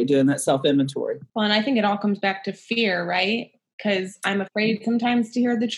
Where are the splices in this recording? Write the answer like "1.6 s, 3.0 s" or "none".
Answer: 1.3 s